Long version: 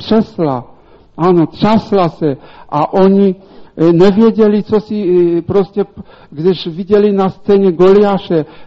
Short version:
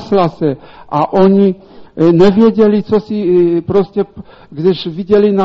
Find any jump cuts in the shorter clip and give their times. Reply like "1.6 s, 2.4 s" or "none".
none

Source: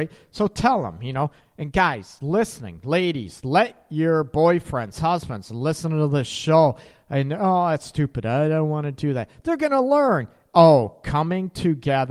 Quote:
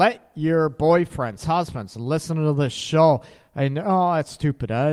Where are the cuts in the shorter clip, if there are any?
none

